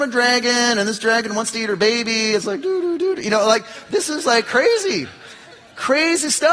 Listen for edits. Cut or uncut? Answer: uncut